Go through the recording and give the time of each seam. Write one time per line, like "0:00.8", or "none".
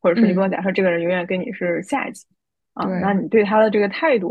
none

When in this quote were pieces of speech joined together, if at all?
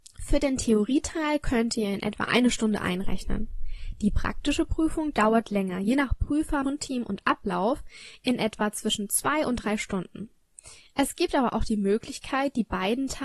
0:06.6

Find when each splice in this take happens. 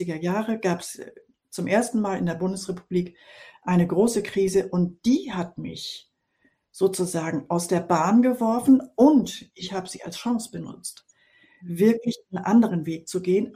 none

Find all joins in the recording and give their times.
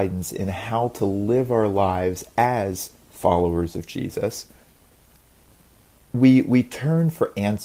none

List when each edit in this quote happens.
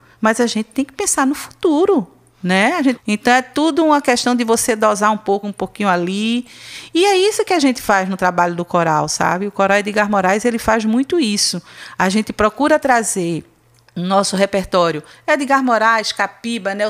0:03.0
0:05.4

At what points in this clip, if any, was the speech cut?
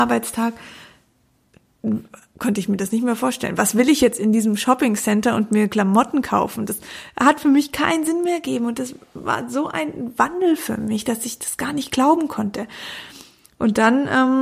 none

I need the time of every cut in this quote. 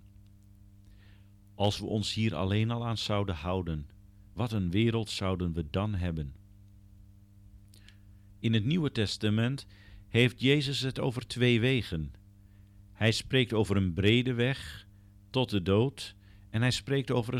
0:04.2

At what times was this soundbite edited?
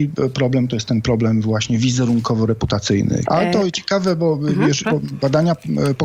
0:03.3
0:04.8

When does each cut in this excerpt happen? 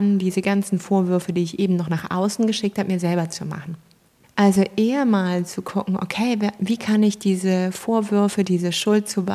0:04.2

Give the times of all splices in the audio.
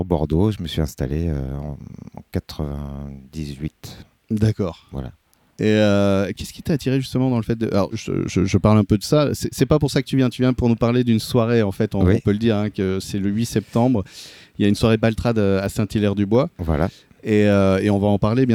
0:07.9

